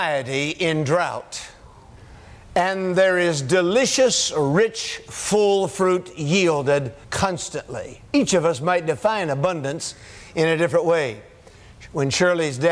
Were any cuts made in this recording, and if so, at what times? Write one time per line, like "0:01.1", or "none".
0:07.0